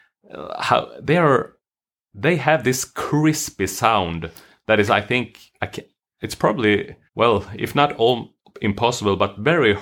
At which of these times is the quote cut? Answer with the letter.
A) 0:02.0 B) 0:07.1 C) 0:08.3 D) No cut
B